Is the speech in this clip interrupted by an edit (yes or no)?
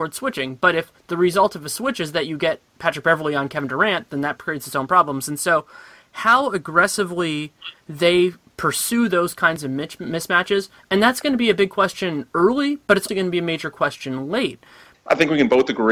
yes